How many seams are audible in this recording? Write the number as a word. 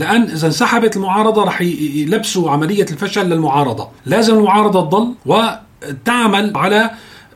two